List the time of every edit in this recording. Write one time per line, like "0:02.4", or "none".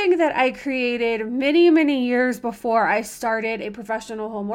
none